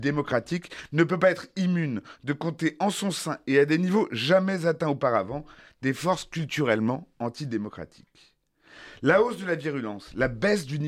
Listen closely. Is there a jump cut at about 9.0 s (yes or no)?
no